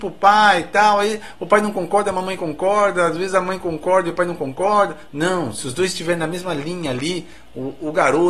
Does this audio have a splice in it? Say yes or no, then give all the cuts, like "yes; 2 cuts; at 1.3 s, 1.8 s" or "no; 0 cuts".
no; 0 cuts